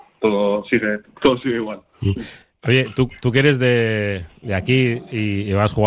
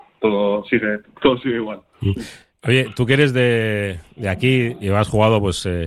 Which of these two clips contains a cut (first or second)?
second